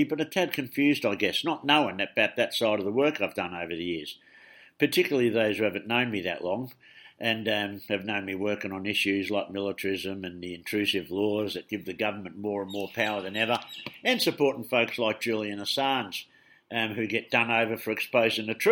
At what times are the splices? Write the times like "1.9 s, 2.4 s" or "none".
none